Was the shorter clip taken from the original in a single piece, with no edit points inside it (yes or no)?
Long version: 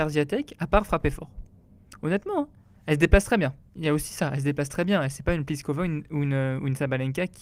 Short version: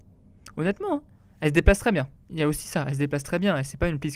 yes